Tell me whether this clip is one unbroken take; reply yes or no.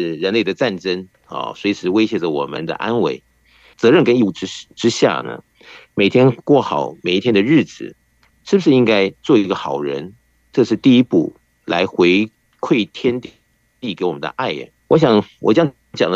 no